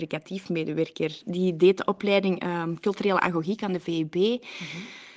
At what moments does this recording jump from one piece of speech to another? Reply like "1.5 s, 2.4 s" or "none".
1.2 s

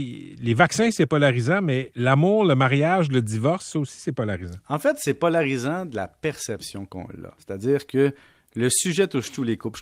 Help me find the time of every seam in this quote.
none

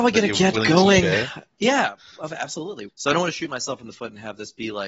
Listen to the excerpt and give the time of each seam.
2.9 s

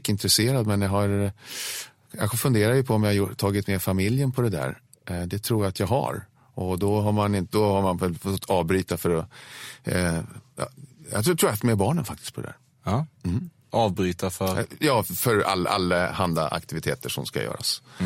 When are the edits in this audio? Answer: none

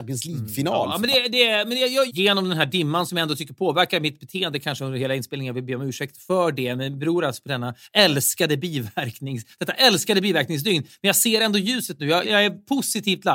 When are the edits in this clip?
2.1 s, 12.2 s

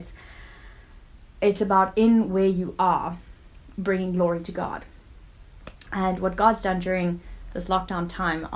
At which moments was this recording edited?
5.9 s

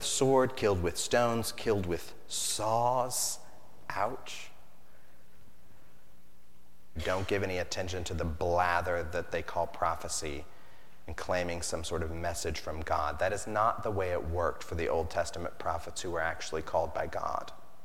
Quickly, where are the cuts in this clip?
7.0 s

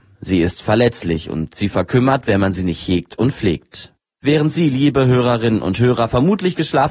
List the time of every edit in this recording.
none

